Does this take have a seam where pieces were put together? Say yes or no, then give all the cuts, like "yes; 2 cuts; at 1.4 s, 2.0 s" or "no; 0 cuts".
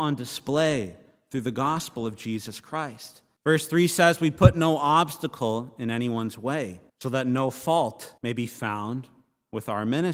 yes; 3 cuts; at 3.4 s, 6.9 s, 8.2 s